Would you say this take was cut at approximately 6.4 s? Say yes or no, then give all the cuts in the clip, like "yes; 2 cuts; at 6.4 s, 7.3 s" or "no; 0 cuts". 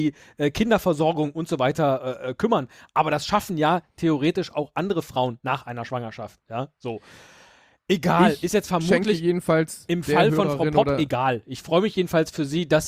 no; 0 cuts